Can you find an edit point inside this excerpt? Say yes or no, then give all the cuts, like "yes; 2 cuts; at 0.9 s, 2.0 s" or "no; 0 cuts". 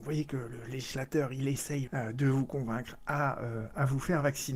yes; 1 cut; at 1.9 s